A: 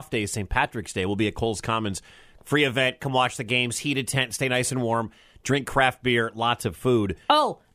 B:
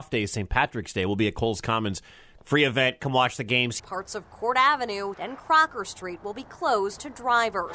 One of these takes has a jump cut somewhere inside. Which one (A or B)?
B